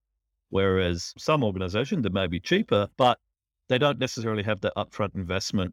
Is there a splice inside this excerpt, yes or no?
no